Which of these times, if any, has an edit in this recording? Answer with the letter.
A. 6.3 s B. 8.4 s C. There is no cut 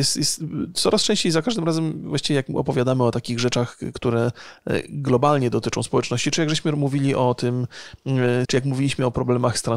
B